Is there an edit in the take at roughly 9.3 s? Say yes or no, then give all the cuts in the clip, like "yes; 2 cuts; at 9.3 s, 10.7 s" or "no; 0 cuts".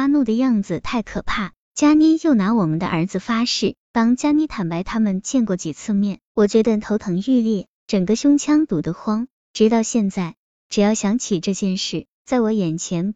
no; 3 cuts; at 3.8 s, 6.3 s, 12.1 s